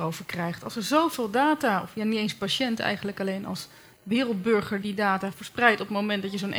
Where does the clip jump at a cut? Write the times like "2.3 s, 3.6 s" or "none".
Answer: 4.8 s